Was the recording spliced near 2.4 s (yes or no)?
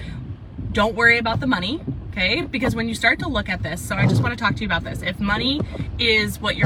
no